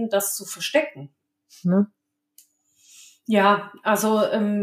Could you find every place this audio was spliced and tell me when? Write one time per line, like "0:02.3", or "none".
0:01.6